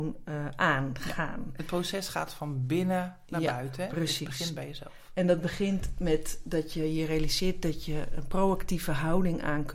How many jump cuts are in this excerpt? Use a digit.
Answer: 0